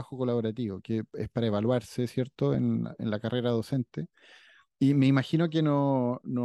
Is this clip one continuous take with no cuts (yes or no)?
yes